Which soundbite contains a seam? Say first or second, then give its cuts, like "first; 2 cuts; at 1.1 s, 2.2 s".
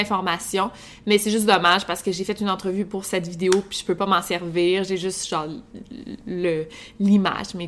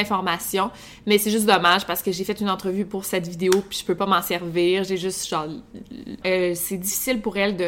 second; 1 cut; at 6.2 s